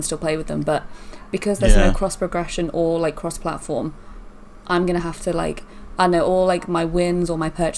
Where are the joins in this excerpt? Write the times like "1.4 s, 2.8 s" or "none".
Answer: none